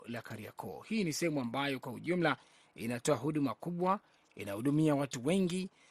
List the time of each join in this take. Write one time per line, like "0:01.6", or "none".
none